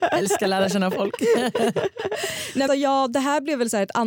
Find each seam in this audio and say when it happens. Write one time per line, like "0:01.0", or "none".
0:02.7